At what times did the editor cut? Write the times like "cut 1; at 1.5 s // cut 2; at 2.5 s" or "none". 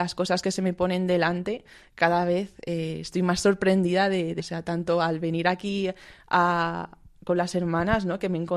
cut 1; at 4.4 s